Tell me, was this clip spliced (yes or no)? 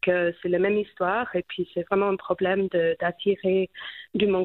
no